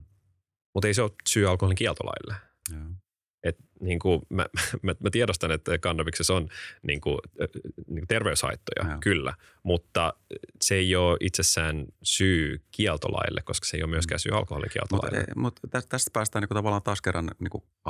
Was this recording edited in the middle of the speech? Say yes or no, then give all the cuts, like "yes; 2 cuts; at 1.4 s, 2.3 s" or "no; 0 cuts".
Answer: no; 0 cuts